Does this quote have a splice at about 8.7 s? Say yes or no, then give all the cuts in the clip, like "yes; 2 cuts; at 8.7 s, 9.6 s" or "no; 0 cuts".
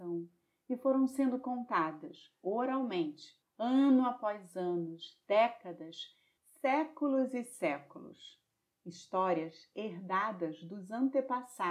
no; 1 cut; at 3.4 s